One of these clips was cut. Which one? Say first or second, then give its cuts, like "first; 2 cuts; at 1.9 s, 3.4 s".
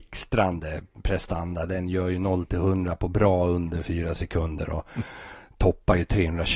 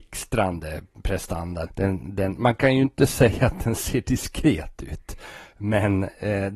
second; 1 cut; at 1.7 s